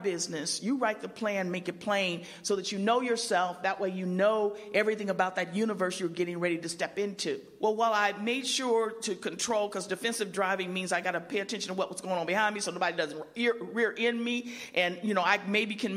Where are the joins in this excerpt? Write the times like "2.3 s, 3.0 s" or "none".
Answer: 7.6 s